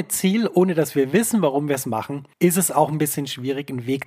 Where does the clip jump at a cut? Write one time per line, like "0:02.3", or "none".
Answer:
0:02.3